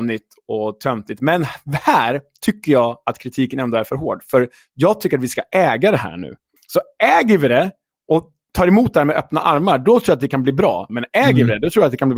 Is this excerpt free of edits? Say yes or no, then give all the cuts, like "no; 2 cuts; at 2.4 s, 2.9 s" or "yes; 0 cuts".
no; 2 cuts; at 6.6 s, 10.9 s